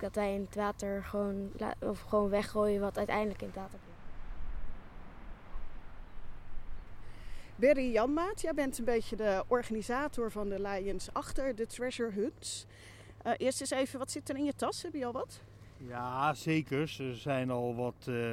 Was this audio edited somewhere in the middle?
no; 0 cuts

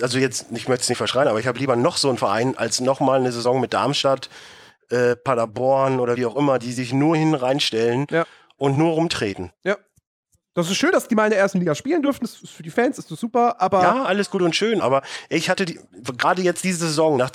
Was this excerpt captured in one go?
yes; 0 cuts

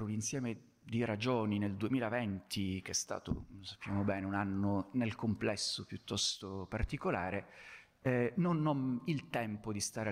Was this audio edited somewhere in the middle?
no; 0 cuts

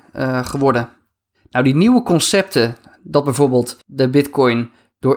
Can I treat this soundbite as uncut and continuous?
no; 1 cut; at 3.8 s

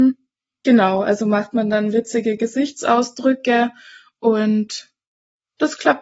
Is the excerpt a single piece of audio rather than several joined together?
yes; 0 cuts

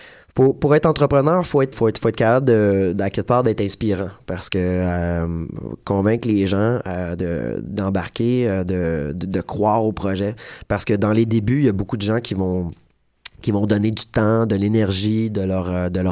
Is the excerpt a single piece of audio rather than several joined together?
no; 1 cut; at 1.7 s

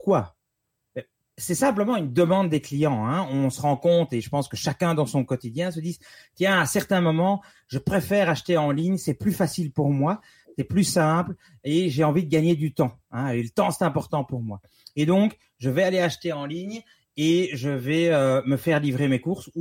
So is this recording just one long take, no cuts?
yes; 0 cuts

